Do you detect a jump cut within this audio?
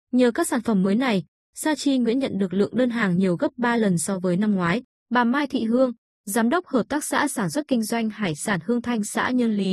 yes; 1 cut; at 4.9 s

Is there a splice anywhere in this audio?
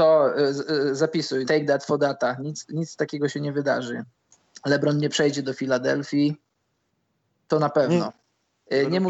yes; 2 cuts; at 1.4 s, 8.1 s

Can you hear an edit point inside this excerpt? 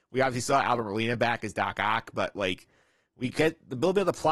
no; 0 cuts

